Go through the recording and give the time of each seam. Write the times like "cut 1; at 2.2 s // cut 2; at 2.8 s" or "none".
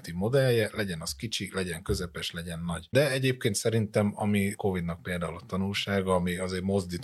cut 1; at 2.9 s